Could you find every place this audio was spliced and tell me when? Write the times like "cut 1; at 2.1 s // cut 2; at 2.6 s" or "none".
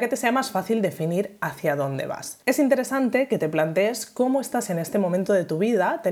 cut 1; at 2.4 s

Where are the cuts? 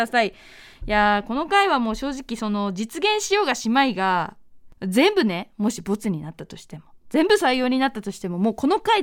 none

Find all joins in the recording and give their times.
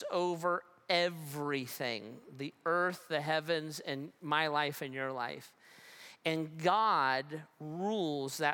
none

